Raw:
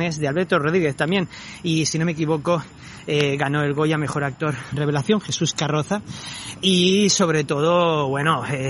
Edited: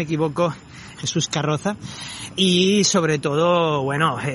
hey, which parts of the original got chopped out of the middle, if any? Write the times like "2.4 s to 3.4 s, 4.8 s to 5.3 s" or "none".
3.0 s to 5.2 s

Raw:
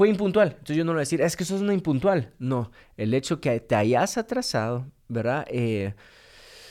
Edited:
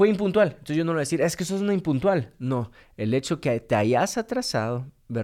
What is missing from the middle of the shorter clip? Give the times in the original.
none

